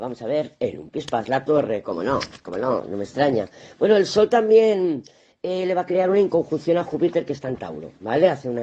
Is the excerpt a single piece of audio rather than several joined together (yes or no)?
yes